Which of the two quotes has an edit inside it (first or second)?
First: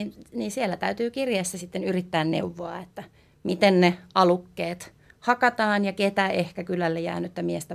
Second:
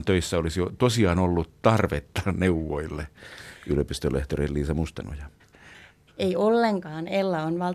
second